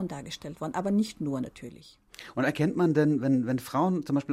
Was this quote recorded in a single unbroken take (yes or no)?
yes